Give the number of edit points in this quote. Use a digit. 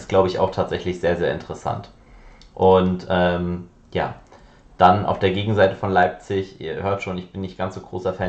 0